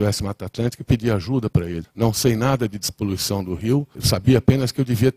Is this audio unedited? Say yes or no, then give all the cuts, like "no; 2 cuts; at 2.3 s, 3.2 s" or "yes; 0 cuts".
no; 2 cuts; at 1.8 s, 3.9 s